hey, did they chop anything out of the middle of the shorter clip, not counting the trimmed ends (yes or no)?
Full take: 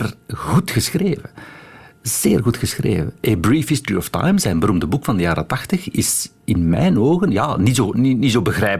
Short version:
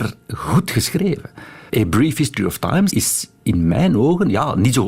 yes